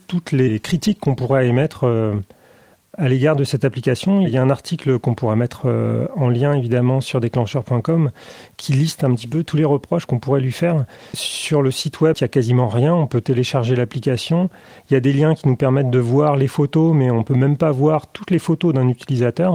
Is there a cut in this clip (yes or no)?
yes